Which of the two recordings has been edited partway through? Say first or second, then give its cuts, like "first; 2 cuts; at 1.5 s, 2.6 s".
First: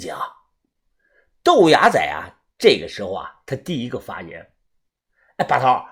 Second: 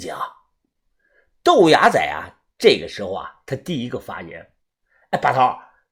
second; 1 cut; at 4.6 s